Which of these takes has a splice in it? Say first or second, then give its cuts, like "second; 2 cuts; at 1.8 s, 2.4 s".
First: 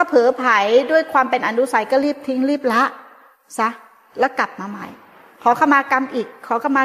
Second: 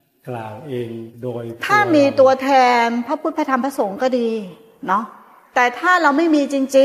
second; 1 cut; at 1.1 s